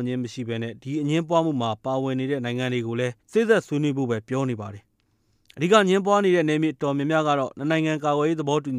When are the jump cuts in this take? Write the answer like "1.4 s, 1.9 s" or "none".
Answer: 3.2 s